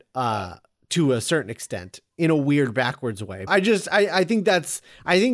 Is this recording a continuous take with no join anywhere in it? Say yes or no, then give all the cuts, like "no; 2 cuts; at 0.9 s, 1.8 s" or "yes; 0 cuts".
no; 1 cut; at 3.5 s